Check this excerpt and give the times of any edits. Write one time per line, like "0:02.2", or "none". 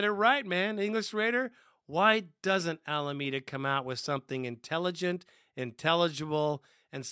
none